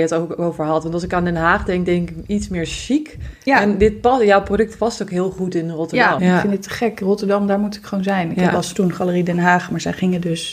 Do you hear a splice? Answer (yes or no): yes